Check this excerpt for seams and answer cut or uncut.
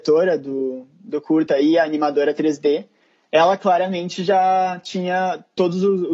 uncut